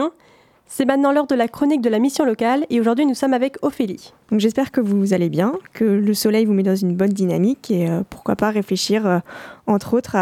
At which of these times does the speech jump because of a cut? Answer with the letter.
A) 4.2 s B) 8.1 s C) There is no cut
A